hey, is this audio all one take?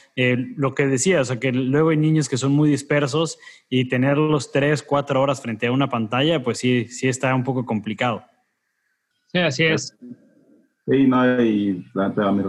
no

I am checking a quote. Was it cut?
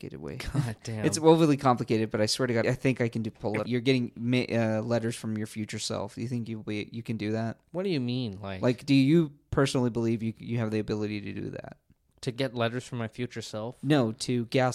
yes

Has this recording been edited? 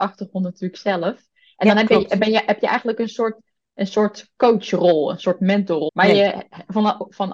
yes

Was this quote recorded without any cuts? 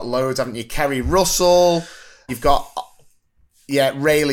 no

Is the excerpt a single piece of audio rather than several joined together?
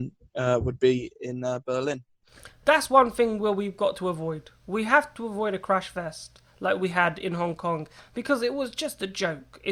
yes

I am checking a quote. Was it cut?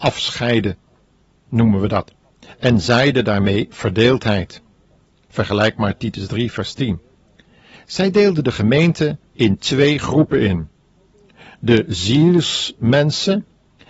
no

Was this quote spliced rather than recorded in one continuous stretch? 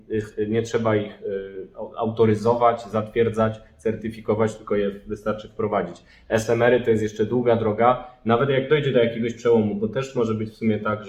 no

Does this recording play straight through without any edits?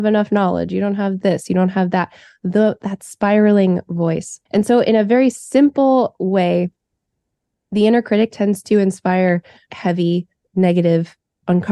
no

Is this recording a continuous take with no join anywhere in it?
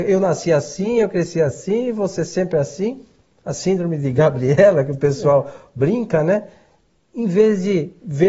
yes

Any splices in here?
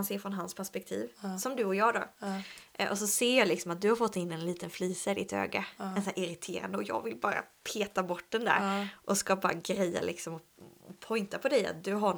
no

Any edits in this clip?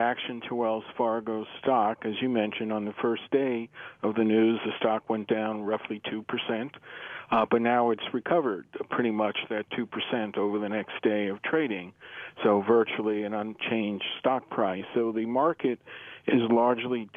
no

